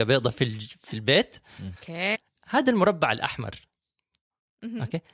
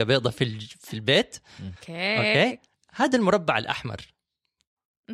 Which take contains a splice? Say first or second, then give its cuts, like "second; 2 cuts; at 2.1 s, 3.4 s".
first; 1 cut; at 2.1 s